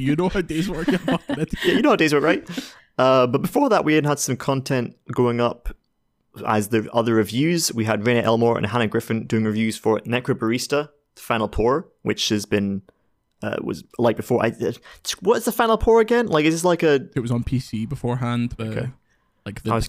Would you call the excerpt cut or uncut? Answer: cut